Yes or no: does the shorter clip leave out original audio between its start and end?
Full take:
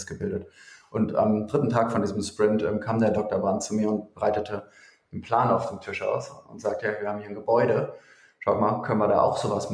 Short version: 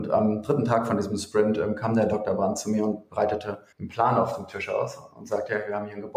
yes